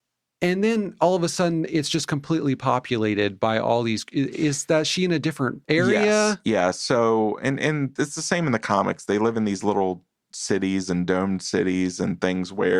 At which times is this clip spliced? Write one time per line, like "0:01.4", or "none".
0:05.6